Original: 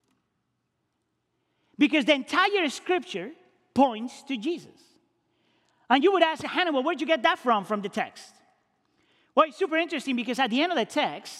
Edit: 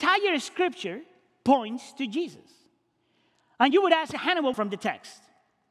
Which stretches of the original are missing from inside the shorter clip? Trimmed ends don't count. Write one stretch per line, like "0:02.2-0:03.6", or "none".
0:06.8-0:07.7